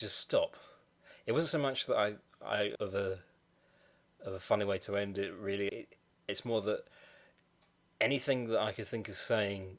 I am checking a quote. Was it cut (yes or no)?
yes